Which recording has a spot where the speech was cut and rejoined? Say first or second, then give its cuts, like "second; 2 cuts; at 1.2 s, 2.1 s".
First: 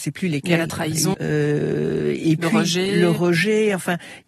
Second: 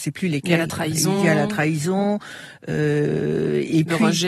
first; 1 cut; at 1.1 s